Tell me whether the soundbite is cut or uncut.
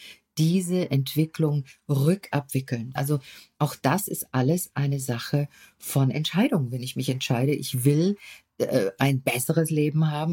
cut